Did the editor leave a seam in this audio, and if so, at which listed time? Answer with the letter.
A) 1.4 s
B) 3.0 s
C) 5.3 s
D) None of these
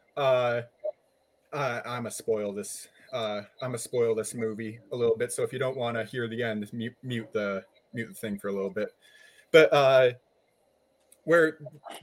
A